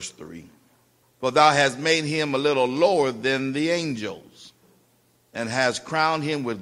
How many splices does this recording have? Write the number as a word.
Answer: one